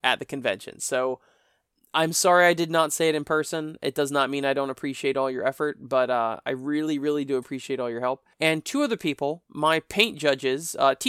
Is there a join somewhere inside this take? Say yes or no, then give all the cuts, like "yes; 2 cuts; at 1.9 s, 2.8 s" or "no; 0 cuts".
yes; 1 cut; at 8.3 s